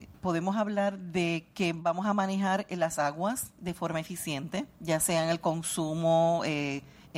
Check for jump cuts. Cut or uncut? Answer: cut